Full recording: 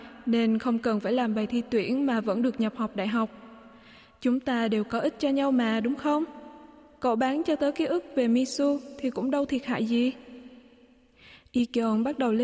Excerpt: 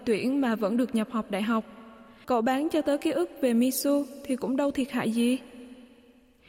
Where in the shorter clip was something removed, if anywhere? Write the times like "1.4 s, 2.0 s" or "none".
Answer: 2.2 s

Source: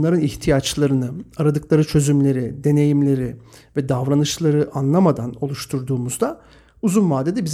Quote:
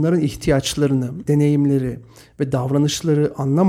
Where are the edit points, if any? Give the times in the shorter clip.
1.3 s

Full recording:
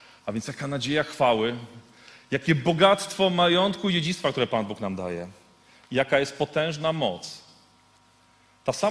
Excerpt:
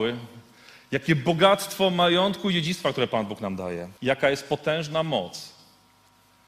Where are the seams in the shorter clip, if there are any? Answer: 4.0 s

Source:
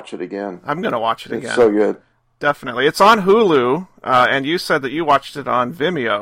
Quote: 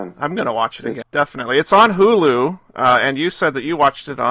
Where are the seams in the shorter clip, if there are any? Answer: 1.0 s

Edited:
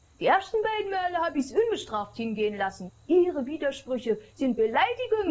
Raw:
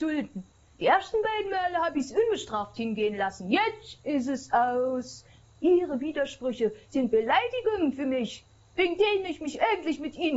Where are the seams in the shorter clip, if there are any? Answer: 2.9 s

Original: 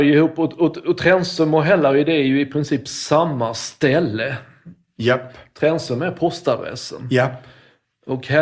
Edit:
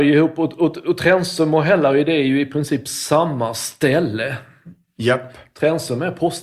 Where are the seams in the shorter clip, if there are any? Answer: none

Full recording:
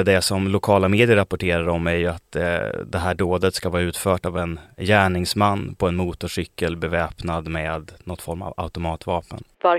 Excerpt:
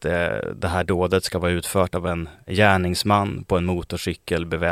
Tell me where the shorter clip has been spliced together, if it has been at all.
none

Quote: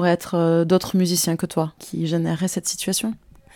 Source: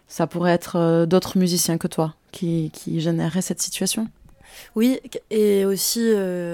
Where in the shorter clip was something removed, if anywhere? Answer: 1.8 s

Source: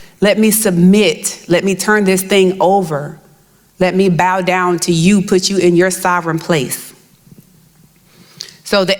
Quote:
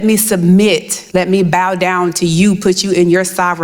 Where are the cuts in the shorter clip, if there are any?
1.1 s

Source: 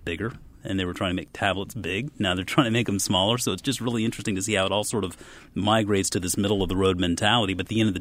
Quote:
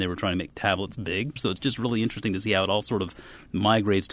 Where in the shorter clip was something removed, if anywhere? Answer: 1.4 s

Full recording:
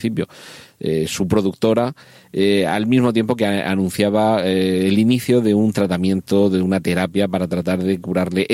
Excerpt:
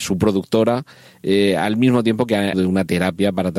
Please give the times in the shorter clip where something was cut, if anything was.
2.5 s

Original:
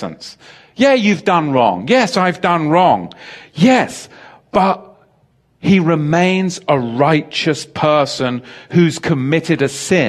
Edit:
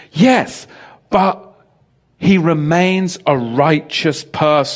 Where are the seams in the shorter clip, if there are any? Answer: none

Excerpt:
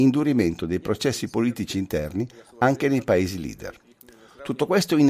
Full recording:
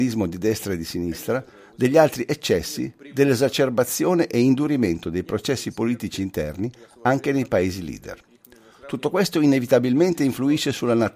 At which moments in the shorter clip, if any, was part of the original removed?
none

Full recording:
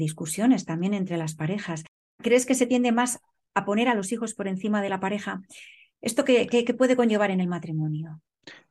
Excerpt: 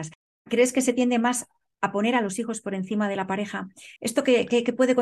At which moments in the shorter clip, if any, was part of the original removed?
4.0 s

